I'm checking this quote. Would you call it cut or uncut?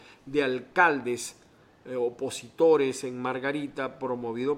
uncut